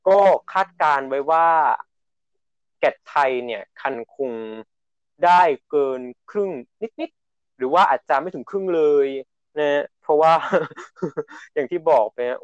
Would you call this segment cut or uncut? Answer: cut